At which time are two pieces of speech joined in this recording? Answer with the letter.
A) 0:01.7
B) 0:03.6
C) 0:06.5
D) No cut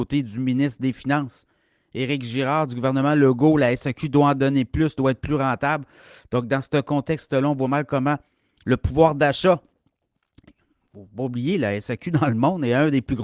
D